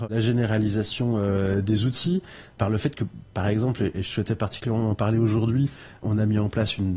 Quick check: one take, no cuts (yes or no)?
yes